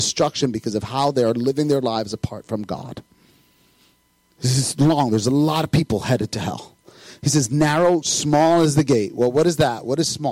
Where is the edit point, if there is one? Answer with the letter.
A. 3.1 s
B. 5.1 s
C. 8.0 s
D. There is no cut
C